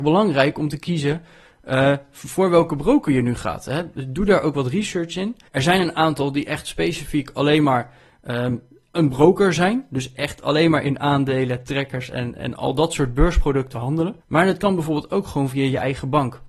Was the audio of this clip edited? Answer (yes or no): yes